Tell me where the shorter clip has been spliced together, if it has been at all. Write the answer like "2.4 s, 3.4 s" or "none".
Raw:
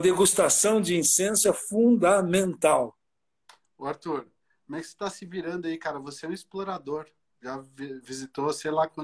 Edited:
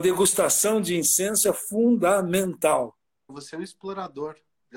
3.3 s